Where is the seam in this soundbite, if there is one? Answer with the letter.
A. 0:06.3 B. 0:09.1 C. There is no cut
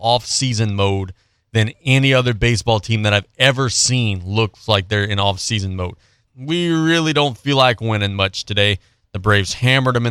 A